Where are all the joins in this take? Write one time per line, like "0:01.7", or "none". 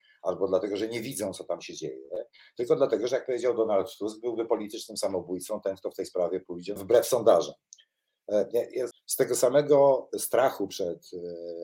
0:06.8
0:08.9

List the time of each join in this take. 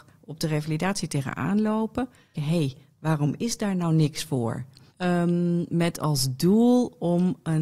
0:02.3
0:04.9

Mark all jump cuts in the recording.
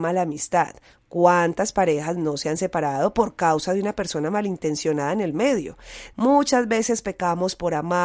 0:06.1

